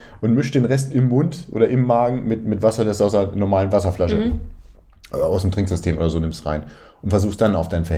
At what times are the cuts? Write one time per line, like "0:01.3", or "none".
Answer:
none